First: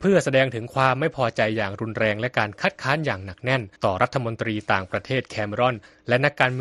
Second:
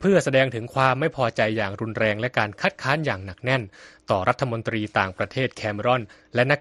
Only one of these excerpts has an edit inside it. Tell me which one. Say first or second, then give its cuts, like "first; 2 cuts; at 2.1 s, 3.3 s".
first; 1 cut; at 3.8 s